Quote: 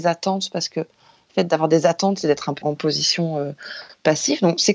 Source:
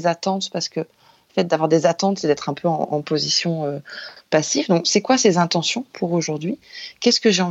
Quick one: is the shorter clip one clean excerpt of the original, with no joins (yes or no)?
no